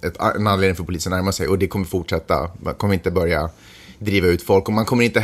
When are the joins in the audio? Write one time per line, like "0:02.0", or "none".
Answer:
none